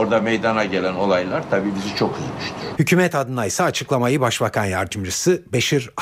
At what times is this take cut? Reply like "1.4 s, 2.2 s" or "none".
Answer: 2.7 s